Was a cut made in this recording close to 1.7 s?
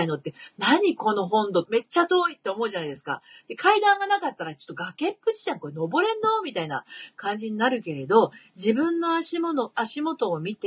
yes; 1 cut; at 1.7 s

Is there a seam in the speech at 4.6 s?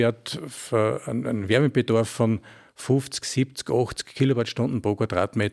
no; 1 cut; at 3.2 s

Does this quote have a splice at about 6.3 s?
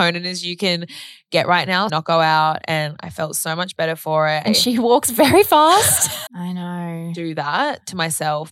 yes; 3 cuts; at 1.9 s, 4.5 s, 6.3 s

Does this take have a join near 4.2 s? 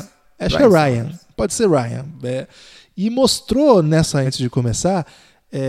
yes; 1 cut; at 4.2 s

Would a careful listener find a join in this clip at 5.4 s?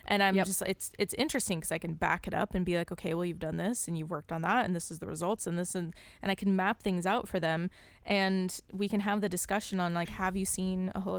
no; 0 cuts

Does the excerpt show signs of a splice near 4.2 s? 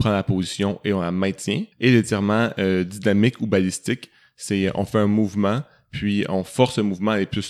no; 1 cut; at 1.7 s

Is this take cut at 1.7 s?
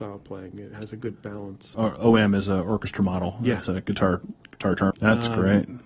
yes; 2 cuts; at 1.7 s, 4.9 s

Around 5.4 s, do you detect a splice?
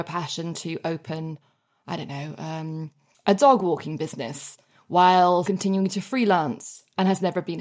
yes; 1 cut; at 5.4 s

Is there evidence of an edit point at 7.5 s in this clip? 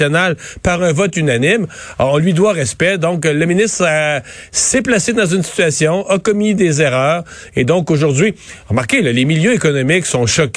no; 0 cuts

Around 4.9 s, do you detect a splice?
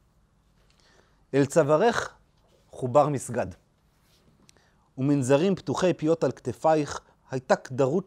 no; 1 cut; at 7.1 s

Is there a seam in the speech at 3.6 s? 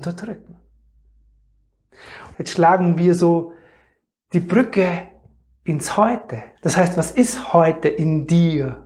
no; 2 cuts; at 2.3 s, 6.6 s

